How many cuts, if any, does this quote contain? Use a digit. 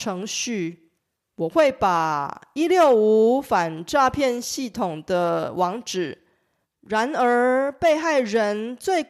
1